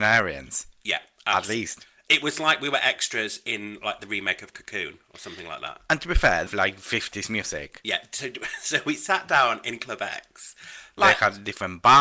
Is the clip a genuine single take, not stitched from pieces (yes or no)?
no